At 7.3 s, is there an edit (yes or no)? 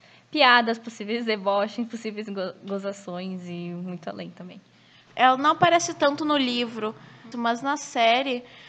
yes